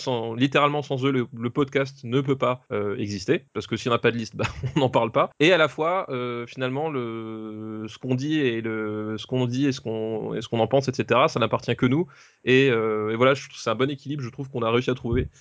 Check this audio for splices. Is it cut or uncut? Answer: uncut